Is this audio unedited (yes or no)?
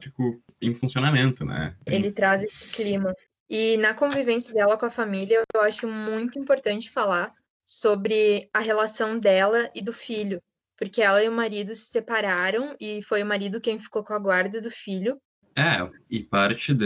no